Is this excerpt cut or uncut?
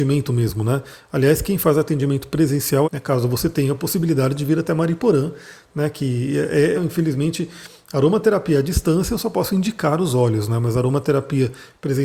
cut